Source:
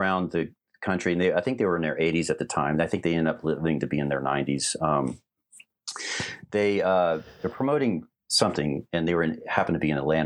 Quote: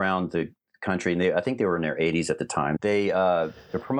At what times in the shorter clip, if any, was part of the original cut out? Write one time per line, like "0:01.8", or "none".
0:02.8

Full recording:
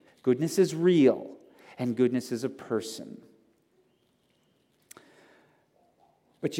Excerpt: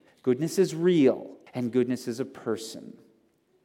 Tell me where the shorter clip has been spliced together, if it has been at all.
0:01.5

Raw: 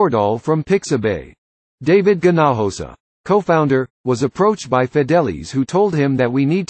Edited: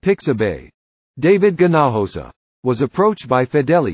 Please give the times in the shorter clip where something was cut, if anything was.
0:02.5

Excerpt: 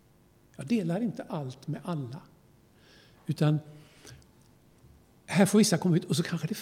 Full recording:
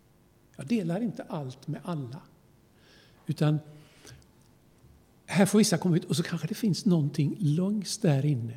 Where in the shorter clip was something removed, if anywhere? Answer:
none

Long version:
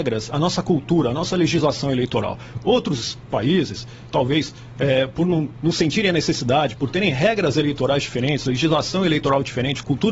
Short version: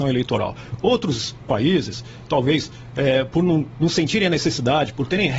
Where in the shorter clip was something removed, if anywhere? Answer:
none

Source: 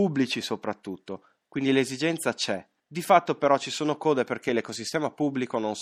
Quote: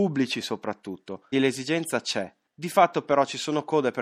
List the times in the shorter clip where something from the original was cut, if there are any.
0:01.3

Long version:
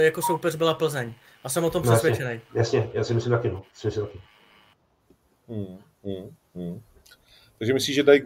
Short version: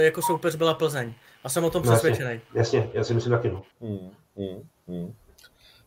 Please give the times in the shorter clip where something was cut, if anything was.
0:03.7

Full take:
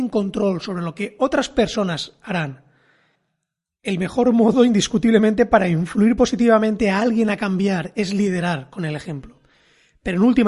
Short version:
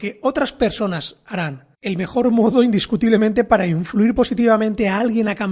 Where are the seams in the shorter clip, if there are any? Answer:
0:01.7

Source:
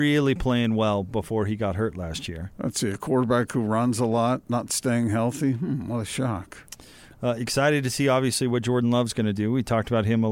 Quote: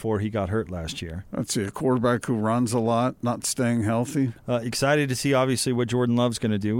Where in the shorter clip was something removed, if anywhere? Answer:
0:04.3

